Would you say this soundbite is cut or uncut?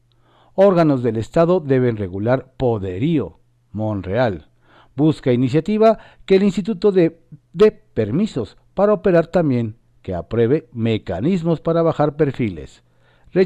uncut